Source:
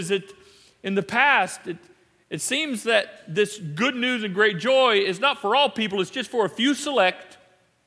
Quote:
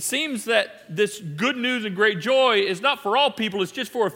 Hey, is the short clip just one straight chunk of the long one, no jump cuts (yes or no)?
yes